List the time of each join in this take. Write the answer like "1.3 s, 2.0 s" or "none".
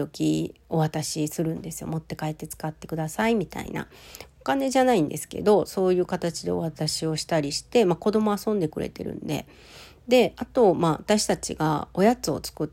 none